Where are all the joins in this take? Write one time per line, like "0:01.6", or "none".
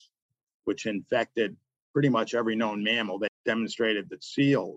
0:03.3